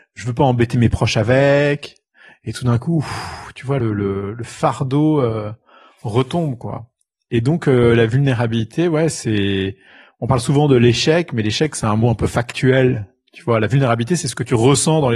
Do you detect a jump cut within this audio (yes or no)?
no